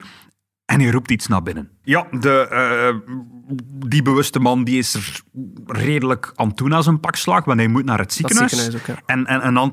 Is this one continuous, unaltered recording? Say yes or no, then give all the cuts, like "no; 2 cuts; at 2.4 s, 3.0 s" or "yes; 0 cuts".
no; 1 cut; at 1.8 s